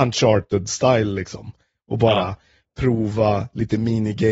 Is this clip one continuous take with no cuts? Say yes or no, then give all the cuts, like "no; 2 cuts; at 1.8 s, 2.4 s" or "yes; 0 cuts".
yes; 0 cuts